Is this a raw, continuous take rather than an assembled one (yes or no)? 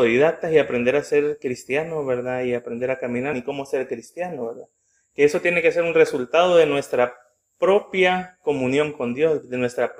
no